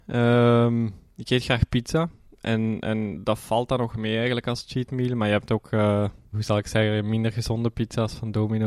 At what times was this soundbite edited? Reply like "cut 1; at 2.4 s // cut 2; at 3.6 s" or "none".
cut 1; at 6.3 s